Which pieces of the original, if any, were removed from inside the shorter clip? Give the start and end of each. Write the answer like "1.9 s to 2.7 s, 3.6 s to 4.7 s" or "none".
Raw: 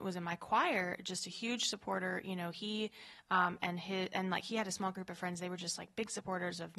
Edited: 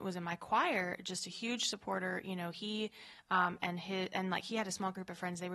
none